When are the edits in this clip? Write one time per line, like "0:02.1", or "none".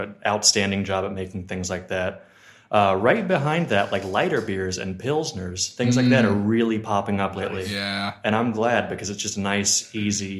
none